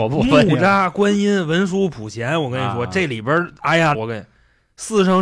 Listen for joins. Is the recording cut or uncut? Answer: cut